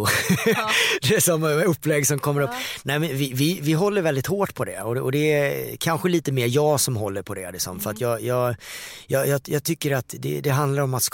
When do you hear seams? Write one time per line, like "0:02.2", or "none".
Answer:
none